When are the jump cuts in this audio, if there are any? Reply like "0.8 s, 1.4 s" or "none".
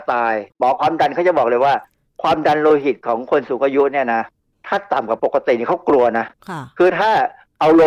none